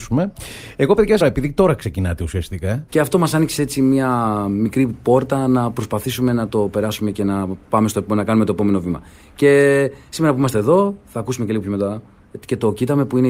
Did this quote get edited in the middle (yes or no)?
yes